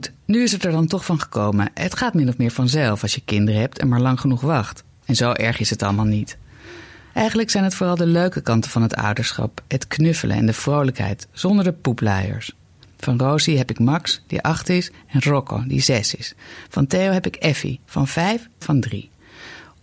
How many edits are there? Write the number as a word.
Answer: one